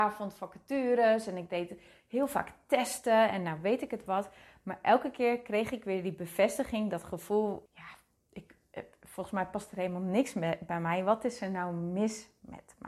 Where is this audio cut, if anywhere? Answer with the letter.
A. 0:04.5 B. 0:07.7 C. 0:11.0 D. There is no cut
B